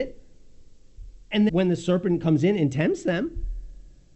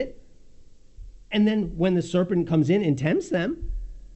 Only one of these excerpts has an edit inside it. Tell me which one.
first; 1 cut; at 1.5 s

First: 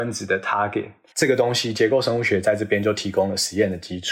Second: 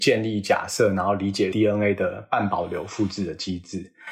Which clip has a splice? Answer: first; 1 cut; at 1.1 s

